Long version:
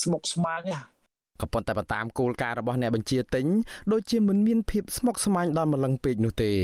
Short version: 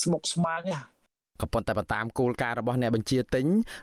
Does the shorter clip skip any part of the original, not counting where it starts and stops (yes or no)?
no